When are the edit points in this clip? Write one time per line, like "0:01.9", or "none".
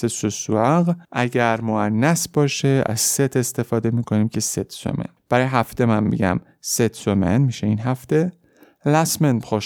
0:01.0
0:05.2

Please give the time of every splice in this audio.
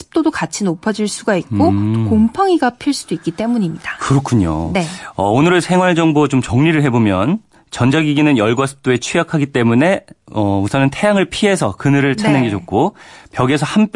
none

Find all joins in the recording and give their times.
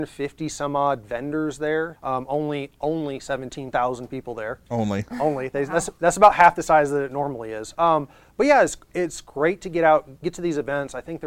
0:01.9

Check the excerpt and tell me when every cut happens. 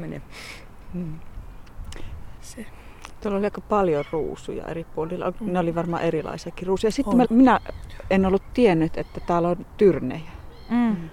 0:02.4
0:07.2

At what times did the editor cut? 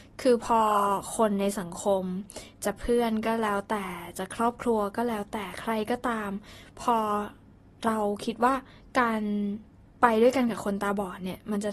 none

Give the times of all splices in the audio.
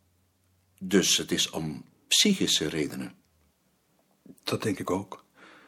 none

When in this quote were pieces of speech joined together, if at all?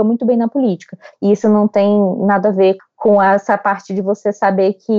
0:01.1
0:02.8

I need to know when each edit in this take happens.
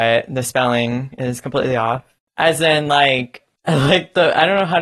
0:02.3

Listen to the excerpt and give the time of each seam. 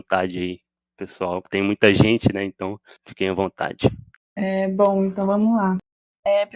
none

